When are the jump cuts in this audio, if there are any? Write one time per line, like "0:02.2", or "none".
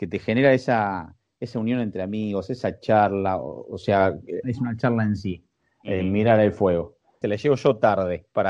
0:04.4
0:07.2